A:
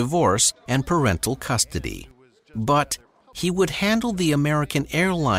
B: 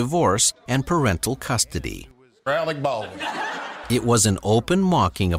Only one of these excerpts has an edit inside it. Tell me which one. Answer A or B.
B